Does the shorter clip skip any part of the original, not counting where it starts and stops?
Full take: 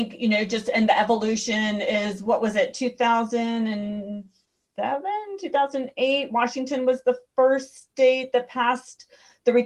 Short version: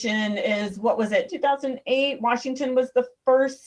yes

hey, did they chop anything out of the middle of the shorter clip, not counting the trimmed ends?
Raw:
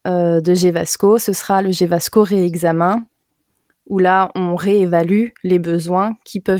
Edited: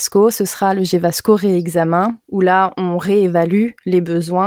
yes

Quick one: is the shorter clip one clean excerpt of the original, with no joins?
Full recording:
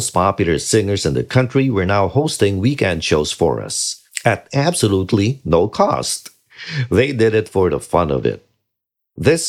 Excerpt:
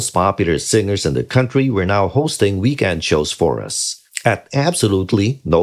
yes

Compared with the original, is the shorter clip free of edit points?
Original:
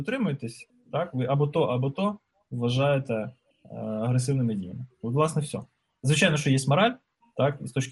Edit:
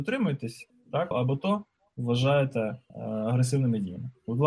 no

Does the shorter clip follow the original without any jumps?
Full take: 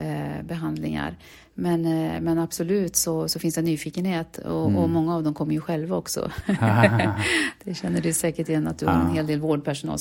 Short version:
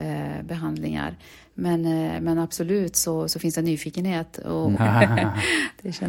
no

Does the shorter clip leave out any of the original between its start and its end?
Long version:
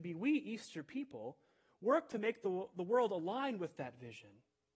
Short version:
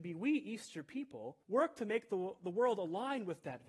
yes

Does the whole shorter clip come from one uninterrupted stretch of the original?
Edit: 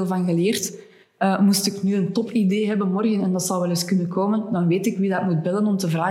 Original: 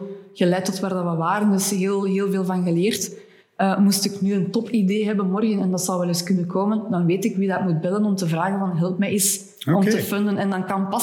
yes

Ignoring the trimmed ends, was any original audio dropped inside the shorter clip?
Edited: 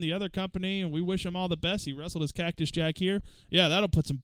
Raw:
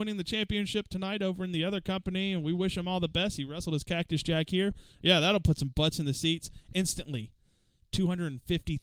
no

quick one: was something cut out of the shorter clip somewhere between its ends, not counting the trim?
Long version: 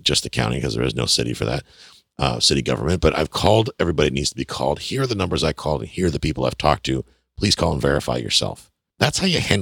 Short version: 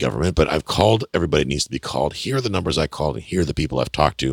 no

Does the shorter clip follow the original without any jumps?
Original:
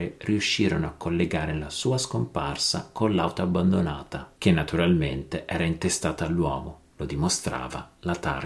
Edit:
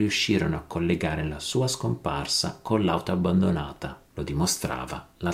no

